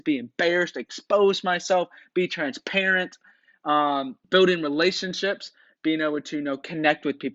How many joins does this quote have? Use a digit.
1